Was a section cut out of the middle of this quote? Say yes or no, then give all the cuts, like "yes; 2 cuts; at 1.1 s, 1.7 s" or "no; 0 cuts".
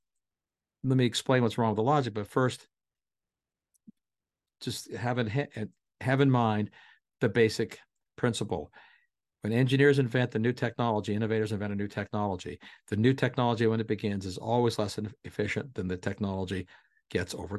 no; 0 cuts